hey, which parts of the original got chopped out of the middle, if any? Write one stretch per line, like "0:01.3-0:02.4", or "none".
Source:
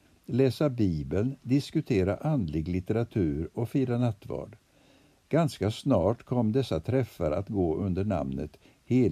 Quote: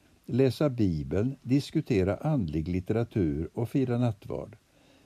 none